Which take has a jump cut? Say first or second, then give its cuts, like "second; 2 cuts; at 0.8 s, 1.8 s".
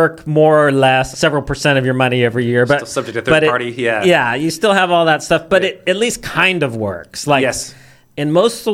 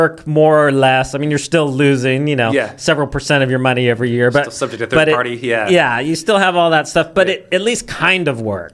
first; 1 cut; at 1.1 s